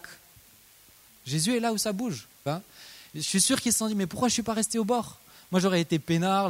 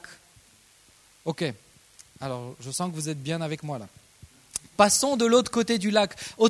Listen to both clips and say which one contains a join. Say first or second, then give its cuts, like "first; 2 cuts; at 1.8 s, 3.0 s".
first; 2 cuts; at 1.1 s, 2.5 s